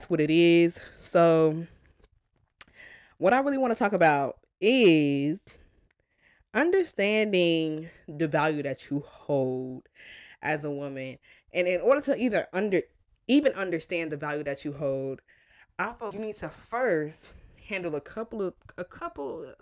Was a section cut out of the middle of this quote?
yes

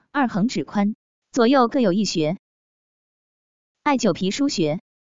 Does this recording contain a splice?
yes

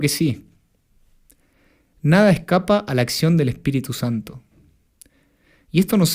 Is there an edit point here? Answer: no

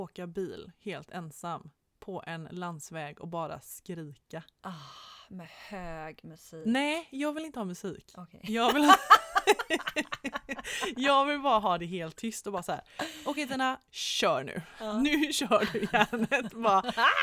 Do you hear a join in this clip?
no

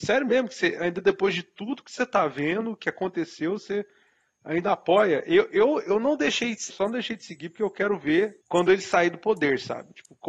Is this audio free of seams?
no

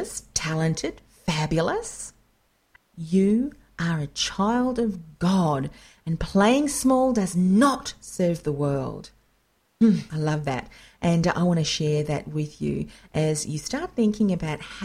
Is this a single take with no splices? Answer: no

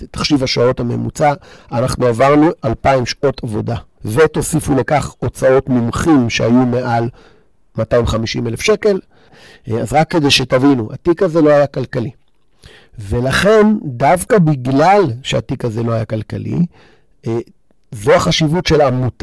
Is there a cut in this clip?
no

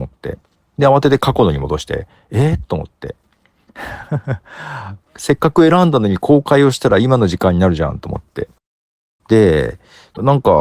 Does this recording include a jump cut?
no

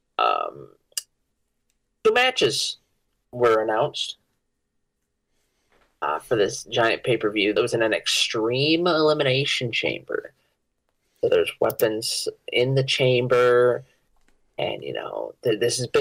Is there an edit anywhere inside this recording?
yes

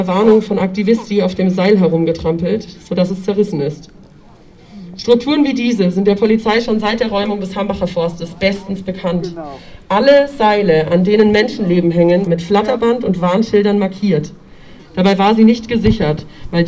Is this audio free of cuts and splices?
no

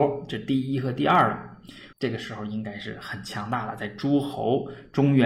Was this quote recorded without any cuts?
no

